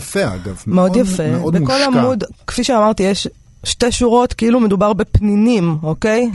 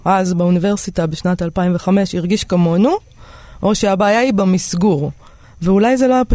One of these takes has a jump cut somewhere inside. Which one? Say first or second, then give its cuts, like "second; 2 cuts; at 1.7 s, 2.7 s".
second; 1 cut; at 5.4 s